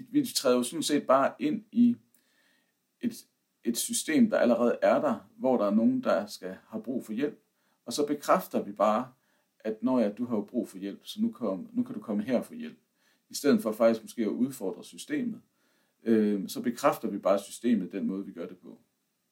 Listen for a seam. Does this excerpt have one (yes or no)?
no